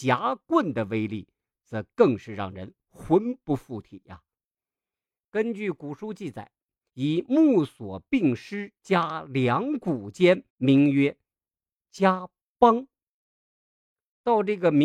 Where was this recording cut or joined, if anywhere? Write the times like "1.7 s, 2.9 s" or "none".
6.9 s, 10.5 s